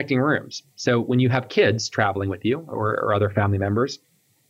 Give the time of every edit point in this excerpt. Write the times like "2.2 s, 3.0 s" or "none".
none